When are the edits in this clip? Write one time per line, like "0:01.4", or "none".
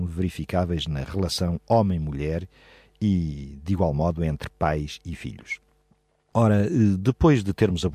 none